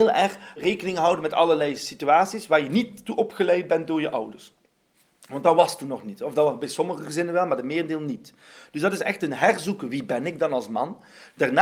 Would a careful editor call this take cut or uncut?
uncut